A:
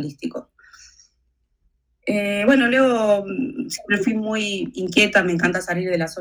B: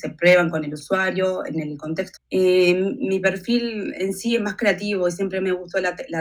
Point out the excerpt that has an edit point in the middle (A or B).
B